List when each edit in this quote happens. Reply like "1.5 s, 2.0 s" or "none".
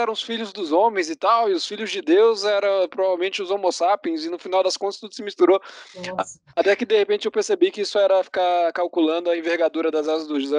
none